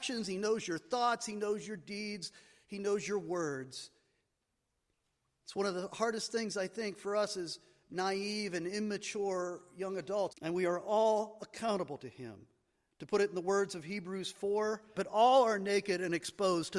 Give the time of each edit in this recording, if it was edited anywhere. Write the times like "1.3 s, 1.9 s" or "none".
5.3 s, 10.3 s, 14.9 s